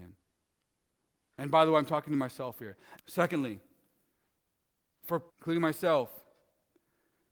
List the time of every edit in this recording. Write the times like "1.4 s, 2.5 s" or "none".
3.0 s, 5.3 s